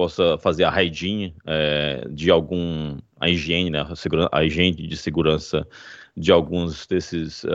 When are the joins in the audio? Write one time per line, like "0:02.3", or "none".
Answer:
none